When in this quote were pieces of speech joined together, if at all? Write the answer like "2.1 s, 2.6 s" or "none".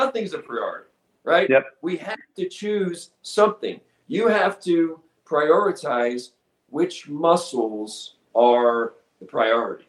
none